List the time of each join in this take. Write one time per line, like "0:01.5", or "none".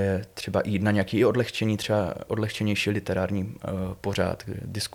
none